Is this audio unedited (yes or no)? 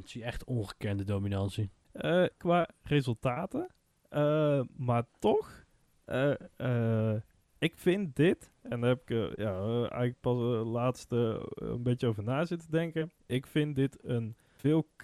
no